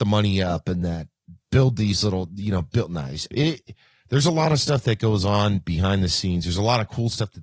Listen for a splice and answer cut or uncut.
cut